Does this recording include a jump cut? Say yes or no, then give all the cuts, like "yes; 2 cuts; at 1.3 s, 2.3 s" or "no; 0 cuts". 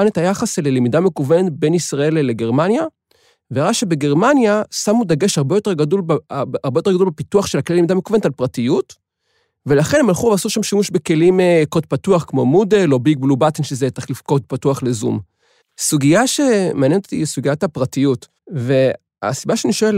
yes; 2 cuts; at 15.6 s, 18.4 s